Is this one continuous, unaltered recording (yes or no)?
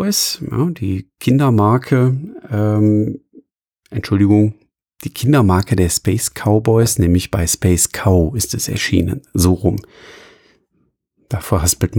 yes